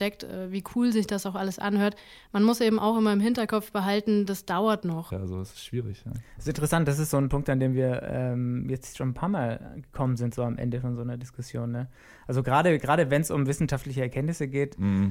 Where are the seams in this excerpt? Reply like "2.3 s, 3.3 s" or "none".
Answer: 5.1 s